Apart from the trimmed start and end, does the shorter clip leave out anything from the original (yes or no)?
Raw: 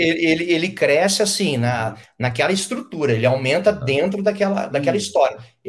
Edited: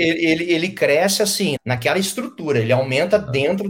yes